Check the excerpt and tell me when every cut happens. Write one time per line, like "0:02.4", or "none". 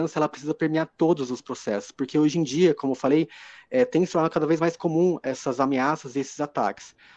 none